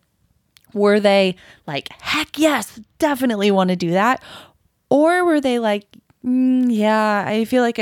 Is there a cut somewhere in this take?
no; 0 cuts

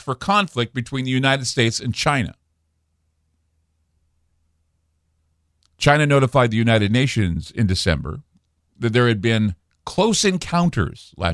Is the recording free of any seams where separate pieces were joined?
yes; 0 cuts

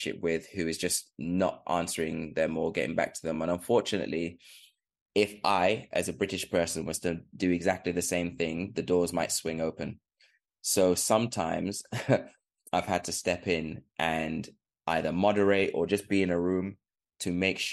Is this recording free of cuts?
yes; 0 cuts

